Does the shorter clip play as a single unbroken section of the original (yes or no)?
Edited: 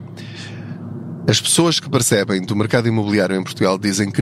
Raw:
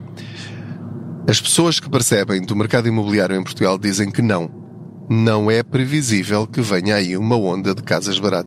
yes